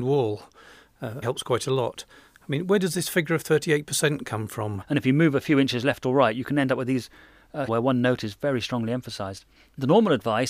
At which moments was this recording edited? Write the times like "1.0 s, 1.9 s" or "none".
1.2 s, 4.8 s, 7.7 s